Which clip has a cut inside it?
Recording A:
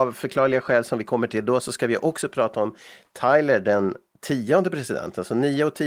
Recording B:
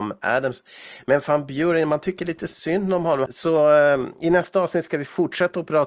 B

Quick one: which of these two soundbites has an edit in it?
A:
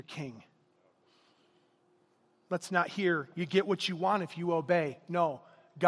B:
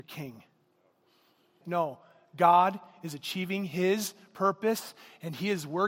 B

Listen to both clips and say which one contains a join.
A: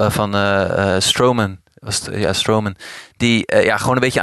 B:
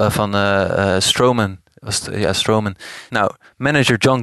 B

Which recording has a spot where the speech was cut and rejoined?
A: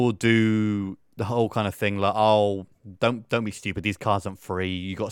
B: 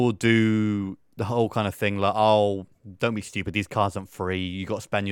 B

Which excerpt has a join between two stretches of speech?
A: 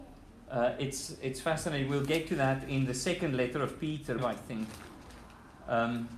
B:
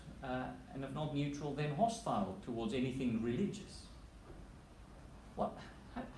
A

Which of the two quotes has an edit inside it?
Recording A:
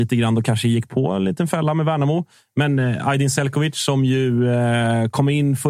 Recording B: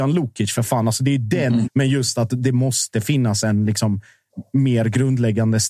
B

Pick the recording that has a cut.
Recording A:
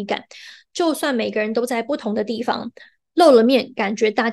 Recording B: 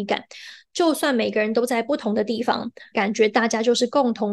B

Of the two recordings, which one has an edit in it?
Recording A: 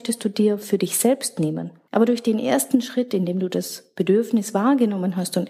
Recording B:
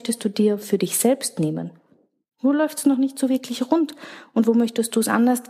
A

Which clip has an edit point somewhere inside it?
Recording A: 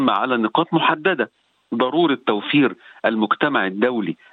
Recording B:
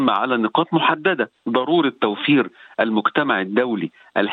B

